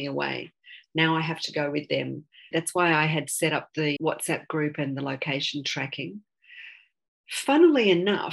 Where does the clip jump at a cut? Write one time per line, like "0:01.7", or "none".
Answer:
0:02.5
0:04.0